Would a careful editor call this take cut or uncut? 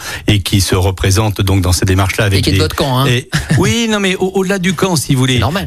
uncut